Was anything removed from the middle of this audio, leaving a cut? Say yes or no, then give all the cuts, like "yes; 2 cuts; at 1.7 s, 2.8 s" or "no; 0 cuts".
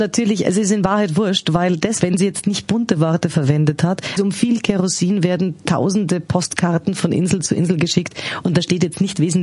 yes; 2 cuts; at 2.0 s, 4.2 s